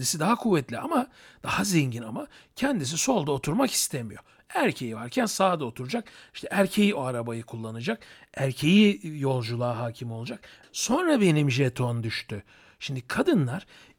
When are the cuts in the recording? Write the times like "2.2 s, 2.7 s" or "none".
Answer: 10.6 s